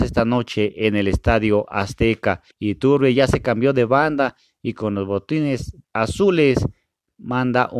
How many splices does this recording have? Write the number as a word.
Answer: two